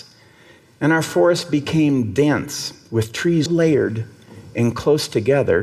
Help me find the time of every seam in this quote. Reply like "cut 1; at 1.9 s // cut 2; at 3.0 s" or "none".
cut 1; at 3.5 s